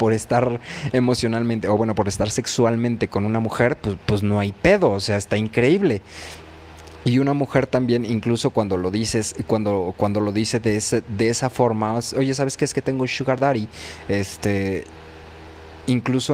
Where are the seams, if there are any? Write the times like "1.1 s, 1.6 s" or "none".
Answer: none